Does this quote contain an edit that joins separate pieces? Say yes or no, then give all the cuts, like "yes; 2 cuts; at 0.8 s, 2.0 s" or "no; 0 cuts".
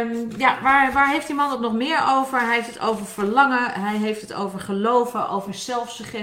no; 0 cuts